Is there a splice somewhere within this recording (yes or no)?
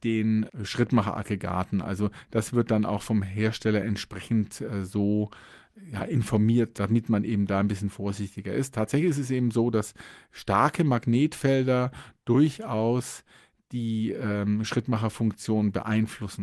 no